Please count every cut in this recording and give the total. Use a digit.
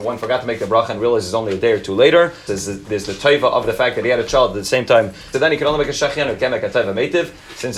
2